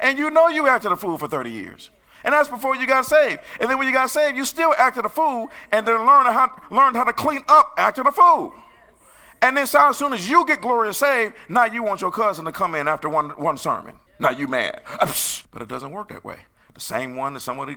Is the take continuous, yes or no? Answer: no